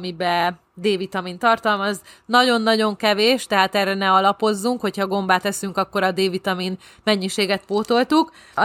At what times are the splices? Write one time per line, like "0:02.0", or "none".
none